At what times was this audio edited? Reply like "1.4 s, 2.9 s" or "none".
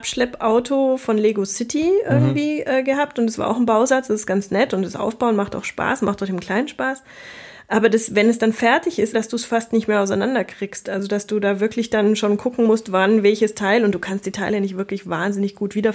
9.1 s